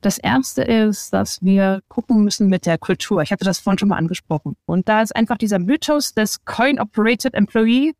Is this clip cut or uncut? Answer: cut